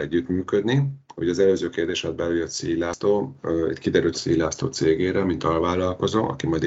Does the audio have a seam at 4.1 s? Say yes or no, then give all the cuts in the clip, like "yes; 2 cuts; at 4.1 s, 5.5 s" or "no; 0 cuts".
yes; 1 cut; at 4.1 s